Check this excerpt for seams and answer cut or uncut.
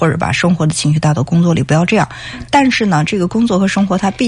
uncut